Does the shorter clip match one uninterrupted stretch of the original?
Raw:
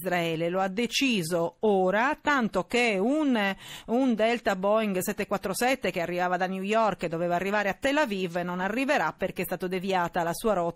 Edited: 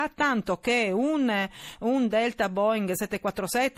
yes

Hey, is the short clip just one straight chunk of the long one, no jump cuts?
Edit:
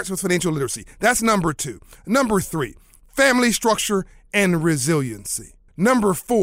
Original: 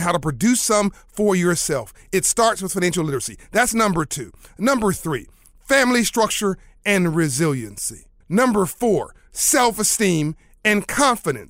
yes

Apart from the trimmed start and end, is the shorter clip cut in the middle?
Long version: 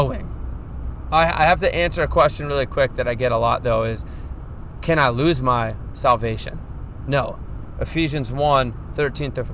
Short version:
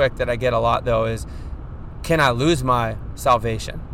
no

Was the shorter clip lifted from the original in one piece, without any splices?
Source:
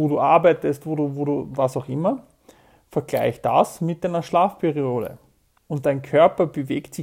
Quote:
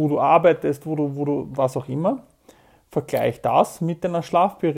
yes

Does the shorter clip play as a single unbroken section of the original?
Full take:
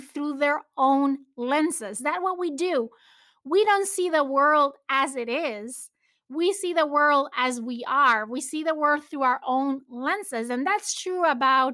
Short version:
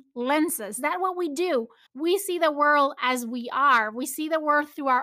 no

